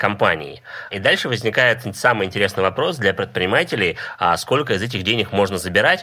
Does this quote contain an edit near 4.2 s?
no; 1 cut; at 0.9 s

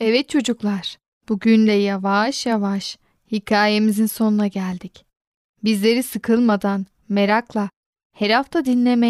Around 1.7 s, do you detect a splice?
no; 0 cuts

